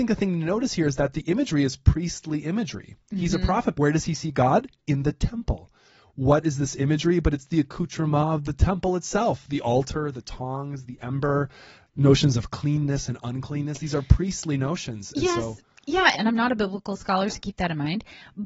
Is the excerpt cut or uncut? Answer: cut